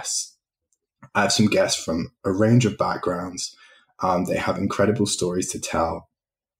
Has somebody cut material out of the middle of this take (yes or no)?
no